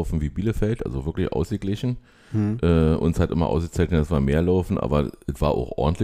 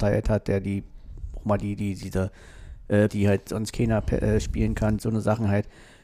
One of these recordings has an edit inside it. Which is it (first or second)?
second